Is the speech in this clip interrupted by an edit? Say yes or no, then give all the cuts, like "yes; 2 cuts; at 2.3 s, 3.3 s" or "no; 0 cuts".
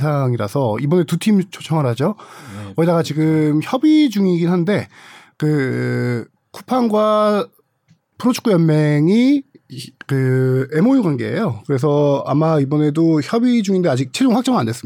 no; 0 cuts